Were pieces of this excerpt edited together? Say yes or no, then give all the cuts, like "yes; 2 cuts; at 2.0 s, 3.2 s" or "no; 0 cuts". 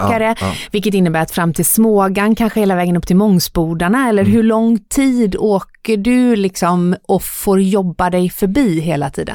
no; 0 cuts